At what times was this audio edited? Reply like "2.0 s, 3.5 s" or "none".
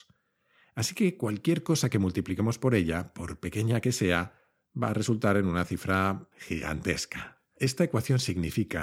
6.3 s, 7.6 s